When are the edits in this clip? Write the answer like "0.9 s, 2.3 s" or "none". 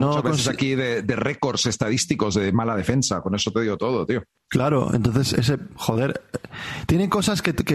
none